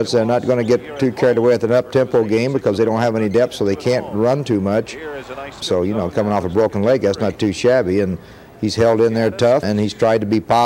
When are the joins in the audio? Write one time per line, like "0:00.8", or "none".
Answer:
0:05.6
0:09.6